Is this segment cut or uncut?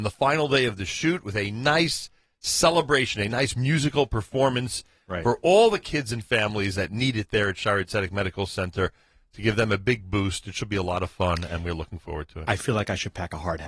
uncut